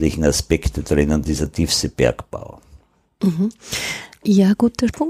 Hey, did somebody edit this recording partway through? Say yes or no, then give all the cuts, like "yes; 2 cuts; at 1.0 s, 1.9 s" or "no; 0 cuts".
no; 0 cuts